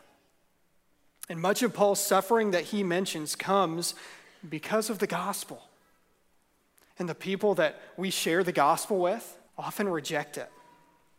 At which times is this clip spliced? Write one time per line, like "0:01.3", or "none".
0:06.9
0:09.5